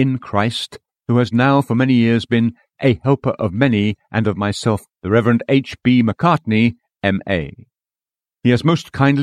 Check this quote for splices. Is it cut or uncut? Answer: cut